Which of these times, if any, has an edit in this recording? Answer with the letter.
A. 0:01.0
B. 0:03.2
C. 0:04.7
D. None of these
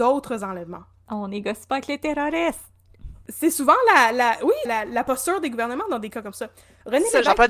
C